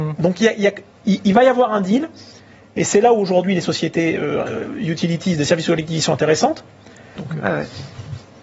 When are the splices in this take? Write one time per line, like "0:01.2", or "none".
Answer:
0:07.2